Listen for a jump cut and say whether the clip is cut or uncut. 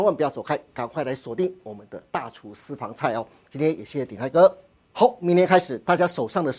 uncut